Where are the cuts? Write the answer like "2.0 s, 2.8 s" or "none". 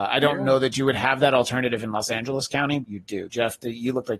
2.8 s